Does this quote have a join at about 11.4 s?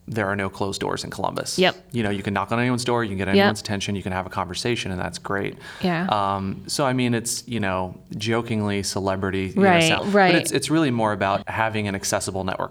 yes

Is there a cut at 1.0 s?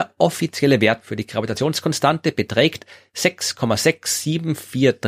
yes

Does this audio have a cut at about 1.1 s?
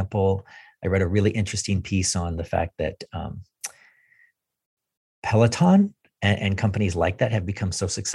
no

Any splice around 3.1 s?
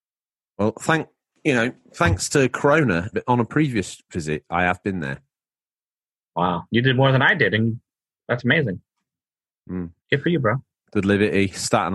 yes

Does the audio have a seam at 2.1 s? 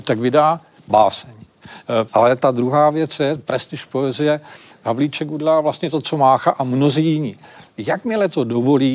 yes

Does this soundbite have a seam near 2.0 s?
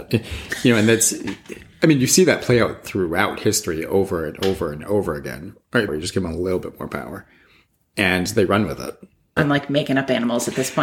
no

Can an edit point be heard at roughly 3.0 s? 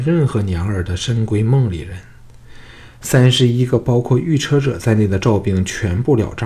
yes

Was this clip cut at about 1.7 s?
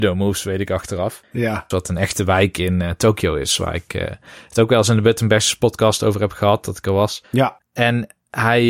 yes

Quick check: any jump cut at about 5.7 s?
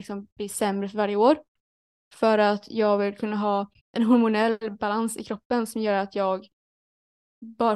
no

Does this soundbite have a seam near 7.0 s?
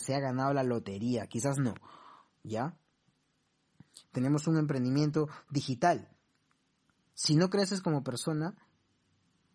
yes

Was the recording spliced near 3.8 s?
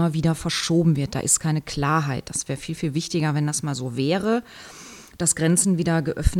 no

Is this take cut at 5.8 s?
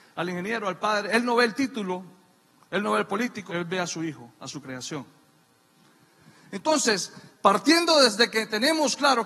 no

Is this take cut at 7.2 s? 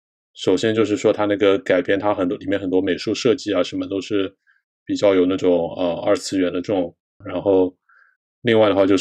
yes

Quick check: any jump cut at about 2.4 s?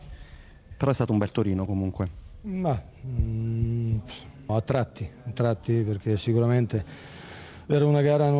no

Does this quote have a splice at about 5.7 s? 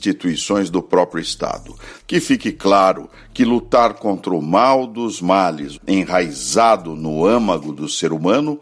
yes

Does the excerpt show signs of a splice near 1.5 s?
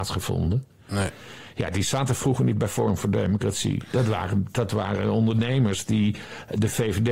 no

